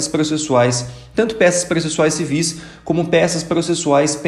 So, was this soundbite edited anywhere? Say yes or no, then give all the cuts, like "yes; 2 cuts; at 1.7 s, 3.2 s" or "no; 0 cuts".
no; 0 cuts